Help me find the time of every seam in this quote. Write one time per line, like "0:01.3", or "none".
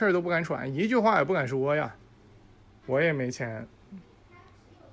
0:02.8